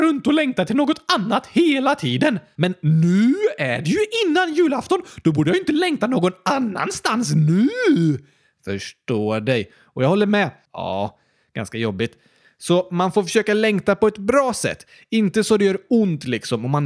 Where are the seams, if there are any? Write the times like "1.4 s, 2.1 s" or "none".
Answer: 2.6 s, 10.7 s